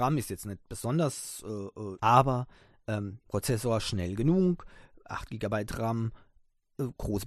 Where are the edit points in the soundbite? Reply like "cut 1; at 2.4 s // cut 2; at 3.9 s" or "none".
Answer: cut 1; at 2.0 s